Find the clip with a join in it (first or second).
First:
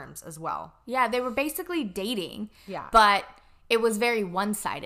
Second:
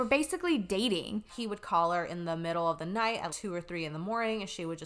second